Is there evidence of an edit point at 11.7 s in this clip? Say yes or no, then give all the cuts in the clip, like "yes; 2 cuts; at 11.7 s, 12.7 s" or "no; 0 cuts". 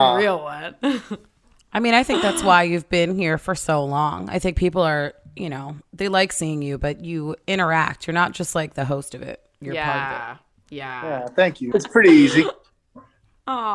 yes; 1 cut; at 11.7 s